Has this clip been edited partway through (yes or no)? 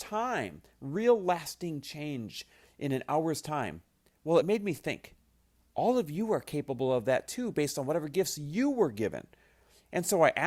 no